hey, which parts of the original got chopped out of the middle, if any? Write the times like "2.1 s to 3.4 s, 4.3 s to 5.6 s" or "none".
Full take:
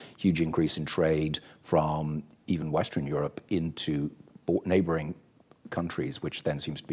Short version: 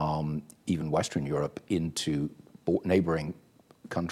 none